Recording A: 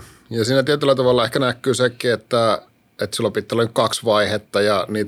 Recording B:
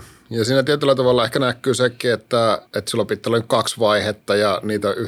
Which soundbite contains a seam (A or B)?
B